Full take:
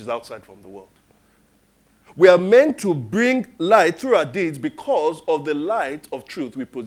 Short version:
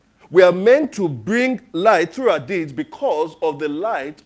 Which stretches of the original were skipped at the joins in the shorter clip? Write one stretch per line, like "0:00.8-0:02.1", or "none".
none